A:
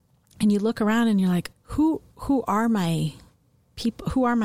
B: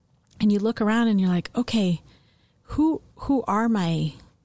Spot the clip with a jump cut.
A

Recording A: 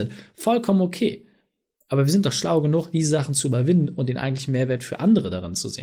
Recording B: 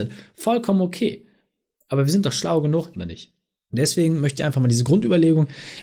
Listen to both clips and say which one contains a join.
B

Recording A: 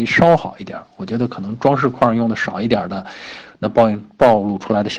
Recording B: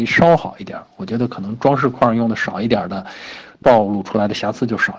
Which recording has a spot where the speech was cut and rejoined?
B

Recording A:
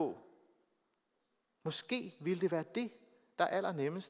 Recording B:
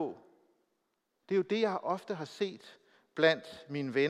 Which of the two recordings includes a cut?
B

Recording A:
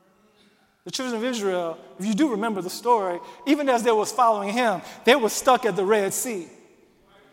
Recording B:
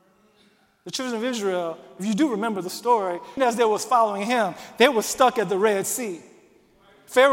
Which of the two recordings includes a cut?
B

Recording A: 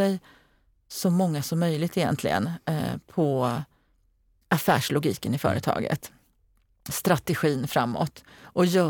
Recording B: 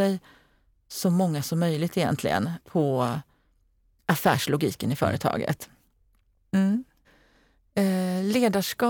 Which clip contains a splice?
B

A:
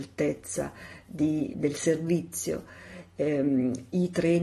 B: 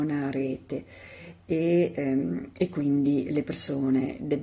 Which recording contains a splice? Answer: A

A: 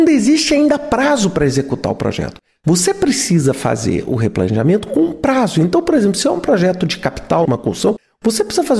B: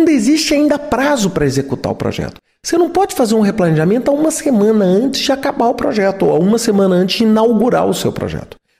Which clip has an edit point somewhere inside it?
A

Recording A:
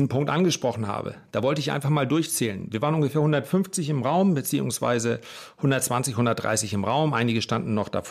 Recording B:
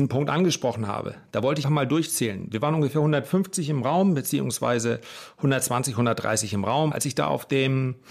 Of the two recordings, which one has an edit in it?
B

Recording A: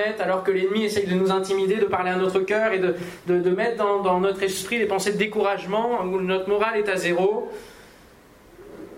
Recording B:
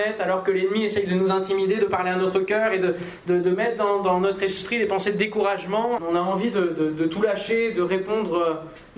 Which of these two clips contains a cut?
B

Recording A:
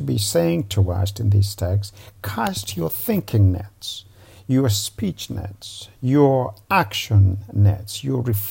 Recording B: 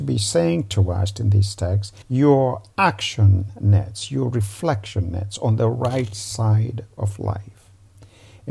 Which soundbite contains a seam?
B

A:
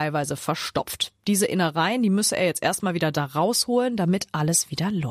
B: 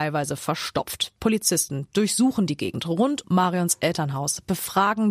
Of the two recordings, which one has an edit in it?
B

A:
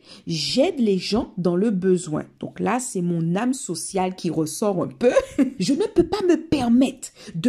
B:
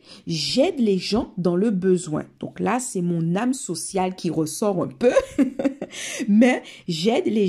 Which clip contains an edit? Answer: A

